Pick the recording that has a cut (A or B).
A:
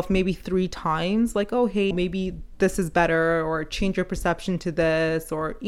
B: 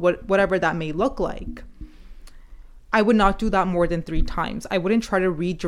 A